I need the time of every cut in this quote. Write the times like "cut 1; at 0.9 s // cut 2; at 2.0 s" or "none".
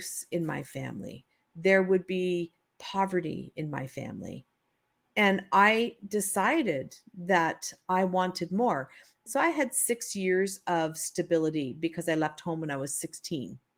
cut 1; at 9.3 s

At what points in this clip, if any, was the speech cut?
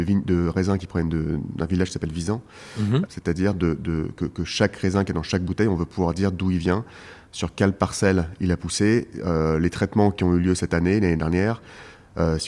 cut 1; at 3.1 s

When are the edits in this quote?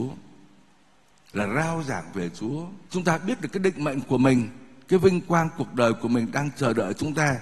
cut 1; at 2.9 s

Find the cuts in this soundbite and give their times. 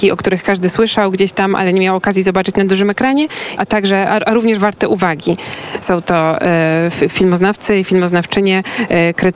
cut 1; at 3.6 s // cut 2; at 5.8 s

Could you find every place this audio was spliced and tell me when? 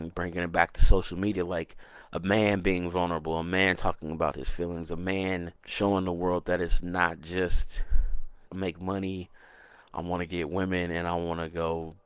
cut 1; at 5.6 s // cut 2; at 8.5 s

